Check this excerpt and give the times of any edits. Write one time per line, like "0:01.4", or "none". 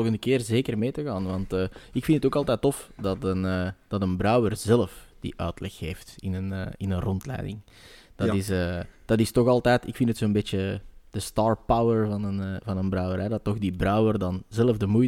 none